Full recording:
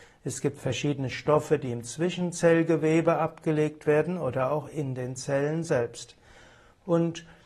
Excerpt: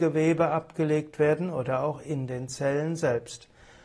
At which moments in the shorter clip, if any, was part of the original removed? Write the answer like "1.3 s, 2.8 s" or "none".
none